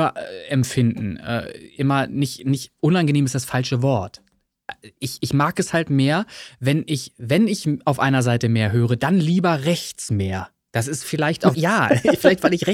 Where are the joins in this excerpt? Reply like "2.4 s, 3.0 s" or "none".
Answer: 11.5 s

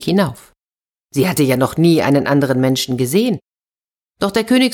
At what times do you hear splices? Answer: 1.0 s

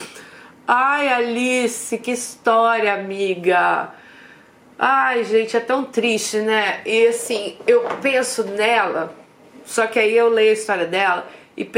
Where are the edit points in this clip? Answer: none

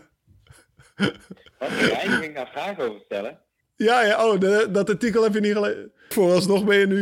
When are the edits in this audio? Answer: 6.1 s

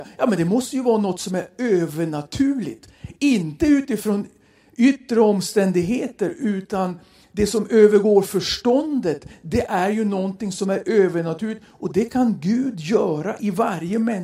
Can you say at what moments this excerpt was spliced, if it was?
none

